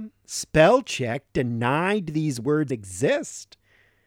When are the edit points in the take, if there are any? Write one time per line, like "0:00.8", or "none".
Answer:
0:02.7